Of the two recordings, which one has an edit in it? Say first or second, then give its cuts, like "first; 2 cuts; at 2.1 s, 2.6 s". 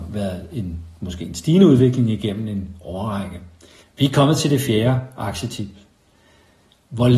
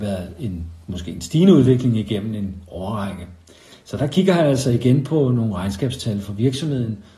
first; 1 cut; at 3.8 s